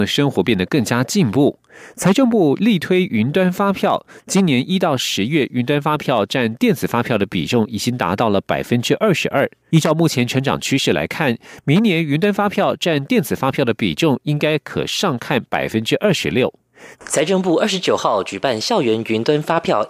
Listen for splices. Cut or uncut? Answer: cut